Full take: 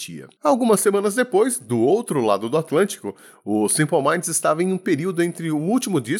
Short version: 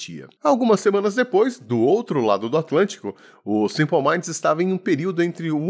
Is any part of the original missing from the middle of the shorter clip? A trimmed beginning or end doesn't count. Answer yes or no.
no